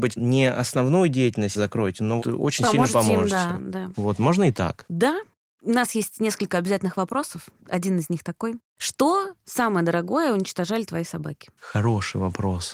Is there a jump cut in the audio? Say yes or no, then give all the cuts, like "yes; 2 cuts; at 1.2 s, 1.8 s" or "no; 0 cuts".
yes; 1 cut; at 2.2 s